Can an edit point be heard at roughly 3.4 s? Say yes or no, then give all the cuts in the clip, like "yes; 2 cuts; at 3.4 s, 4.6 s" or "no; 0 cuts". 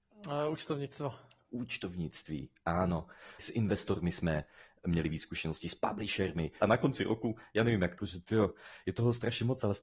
yes; 3 cuts; at 3.4 s, 6.6 s, 8.0 s